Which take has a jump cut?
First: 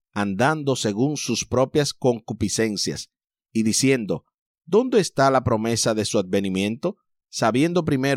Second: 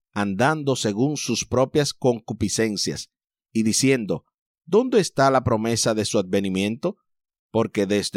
first; 1 cut; at 7.2 s

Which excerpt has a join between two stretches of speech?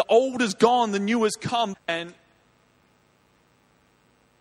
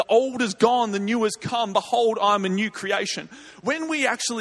first; 1 cut; at 1.7 s

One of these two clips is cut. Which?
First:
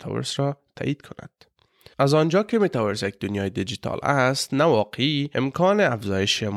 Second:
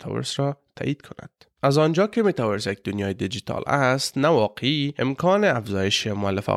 second; 1 cut; at 1.6 s

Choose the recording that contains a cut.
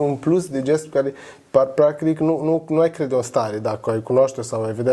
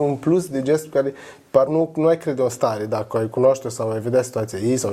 second; 1 cut; at 1.7 s

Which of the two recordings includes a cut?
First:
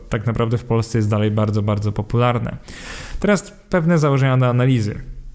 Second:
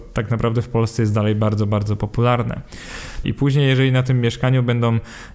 second; 1 cut; at 3.2 s

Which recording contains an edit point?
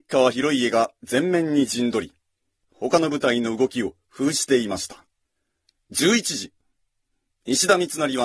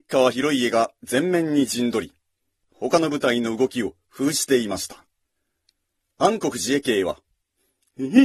first; 1 cut; at 5.8 s

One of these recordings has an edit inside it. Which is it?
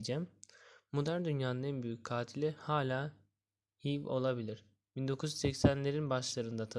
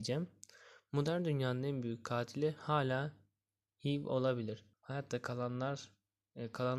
second; 1 cut; at 4.7 s

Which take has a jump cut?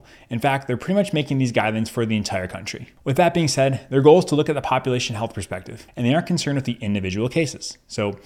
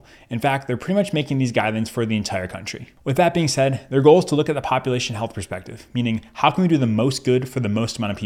first; 1 cut; at 5.9 s

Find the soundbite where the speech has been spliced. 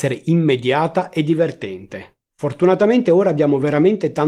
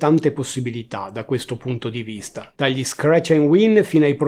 second; 1 cut; at 2.5 s

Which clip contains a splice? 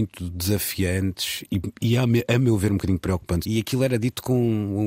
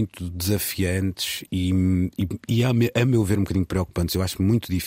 first; 2 cuts; at 1.5 s, 3.4 s

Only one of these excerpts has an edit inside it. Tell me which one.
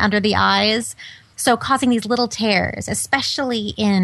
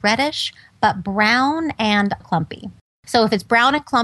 second; 1 cut; at 2.2 s

